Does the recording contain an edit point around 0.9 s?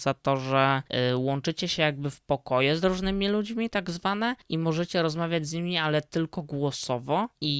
no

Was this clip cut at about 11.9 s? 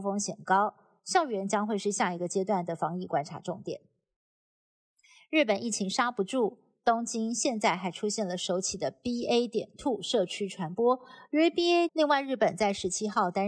yes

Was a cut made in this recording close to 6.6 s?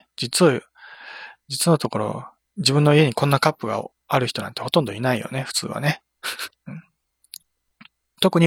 yes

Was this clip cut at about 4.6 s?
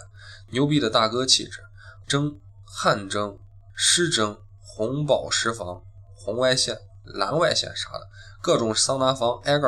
no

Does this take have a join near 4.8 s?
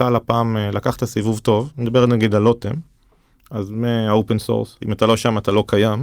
yes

